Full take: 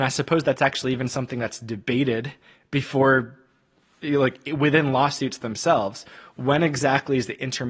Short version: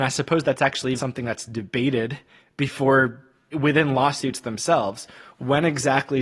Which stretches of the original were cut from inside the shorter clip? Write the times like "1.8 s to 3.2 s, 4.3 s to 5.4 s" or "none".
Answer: 1.0 s to 1.1 s, 3.7 s to 4.5 s